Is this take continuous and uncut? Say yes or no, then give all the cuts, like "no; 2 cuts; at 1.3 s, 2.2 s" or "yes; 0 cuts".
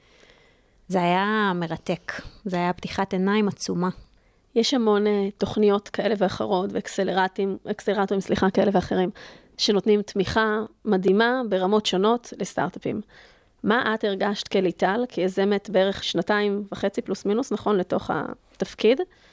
no; 1 cut; at 16.0 s